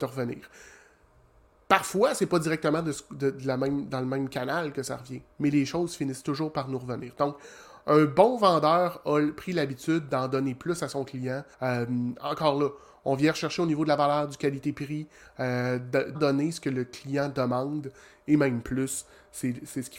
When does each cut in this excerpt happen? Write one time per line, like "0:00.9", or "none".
0:11.5
0:16.1

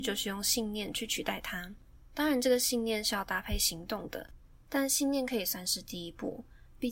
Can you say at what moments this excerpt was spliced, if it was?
none

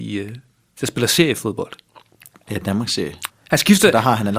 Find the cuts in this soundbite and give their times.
0:03.3

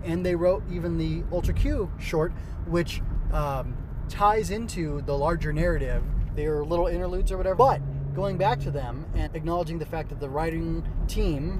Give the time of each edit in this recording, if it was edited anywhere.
0:06.3
0:07.6
0:09.3

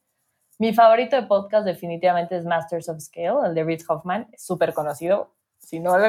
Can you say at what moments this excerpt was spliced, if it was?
none

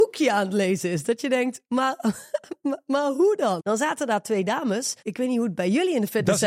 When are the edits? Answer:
0:03.6
0:05.0

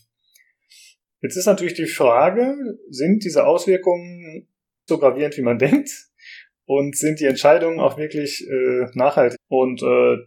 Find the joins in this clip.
0:04.9
0:09.3

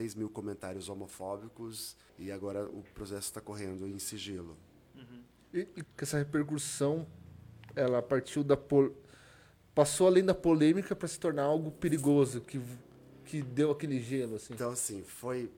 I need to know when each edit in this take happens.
0:02.1
0:05.8

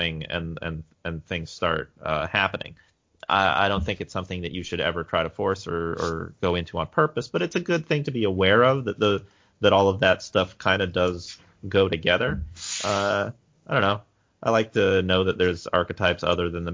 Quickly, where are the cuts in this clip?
none

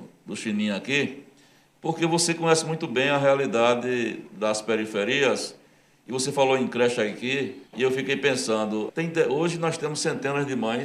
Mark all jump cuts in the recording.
0:07.7
0:08.9

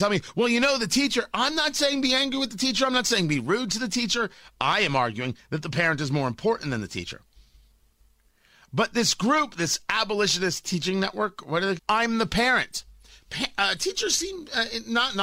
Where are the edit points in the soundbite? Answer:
0:11.8

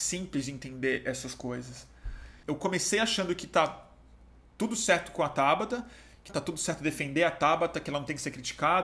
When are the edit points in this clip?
0:02.4
0:06.3

